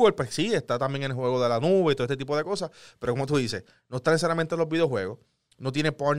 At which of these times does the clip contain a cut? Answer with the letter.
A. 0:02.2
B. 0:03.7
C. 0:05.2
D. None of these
D